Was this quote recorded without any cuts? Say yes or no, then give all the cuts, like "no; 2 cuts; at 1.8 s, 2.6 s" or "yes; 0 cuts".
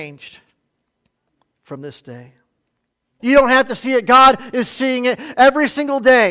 no; 1 cut; at 3.2 s